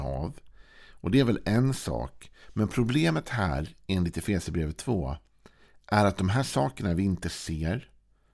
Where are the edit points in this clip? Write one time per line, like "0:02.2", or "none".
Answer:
none